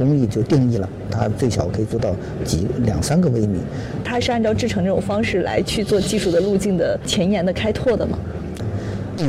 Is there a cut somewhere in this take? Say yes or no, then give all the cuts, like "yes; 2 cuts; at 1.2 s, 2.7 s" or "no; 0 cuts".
yes; 1 cut; at 4.0 s